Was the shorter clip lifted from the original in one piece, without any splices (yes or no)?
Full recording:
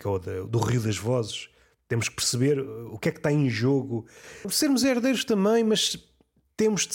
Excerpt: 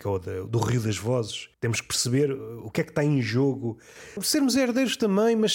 no